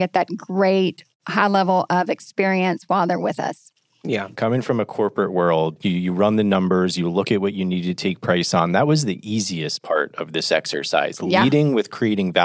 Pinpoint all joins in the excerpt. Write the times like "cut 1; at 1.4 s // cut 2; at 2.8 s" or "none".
cut 1; at 4.4 s